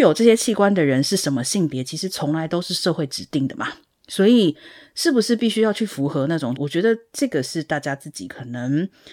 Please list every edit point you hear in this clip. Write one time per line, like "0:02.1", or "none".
0:06.6